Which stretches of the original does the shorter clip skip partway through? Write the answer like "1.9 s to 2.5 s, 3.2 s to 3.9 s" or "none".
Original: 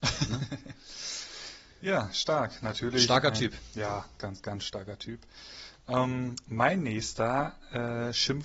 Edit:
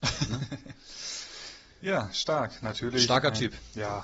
none

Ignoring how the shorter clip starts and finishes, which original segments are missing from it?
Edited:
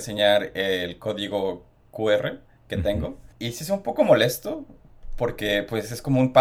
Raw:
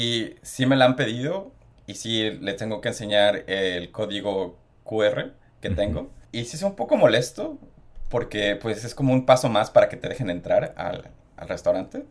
none

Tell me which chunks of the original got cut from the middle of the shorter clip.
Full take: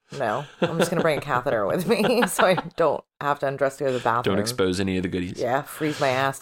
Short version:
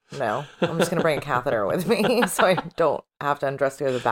none

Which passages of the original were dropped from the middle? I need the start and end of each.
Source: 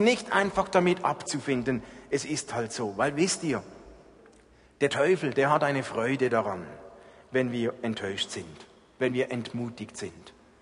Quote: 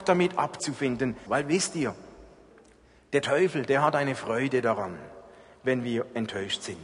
1.9 s to 2.9 s

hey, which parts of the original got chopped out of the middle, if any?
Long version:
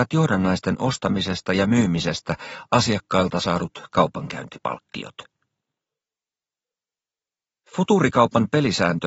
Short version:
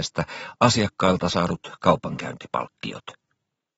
none

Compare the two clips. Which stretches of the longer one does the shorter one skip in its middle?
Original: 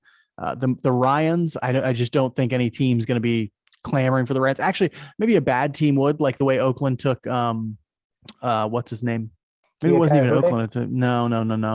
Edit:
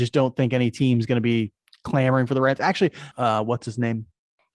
5.1 s to 8.4 s

